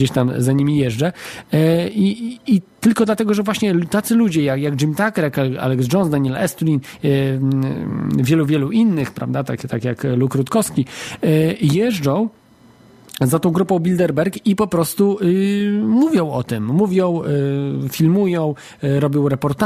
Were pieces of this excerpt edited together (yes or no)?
no